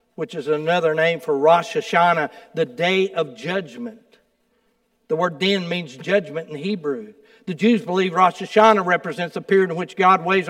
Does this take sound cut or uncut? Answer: uncut